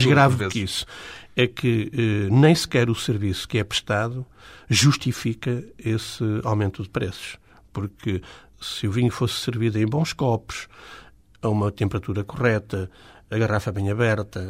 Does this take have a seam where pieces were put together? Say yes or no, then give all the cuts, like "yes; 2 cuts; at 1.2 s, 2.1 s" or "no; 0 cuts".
no; 0 cuts